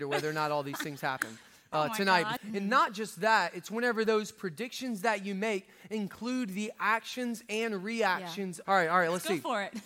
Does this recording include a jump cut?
yes; 2 cuts; at 2.4 s, 8.6 s

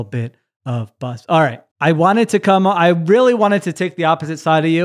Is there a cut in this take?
yes; 1 cut; at 1.7 s

